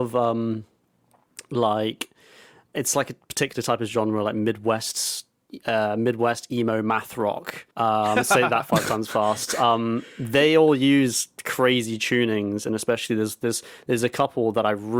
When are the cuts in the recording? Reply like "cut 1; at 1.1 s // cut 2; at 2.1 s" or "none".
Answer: cut 1; at 7.7 s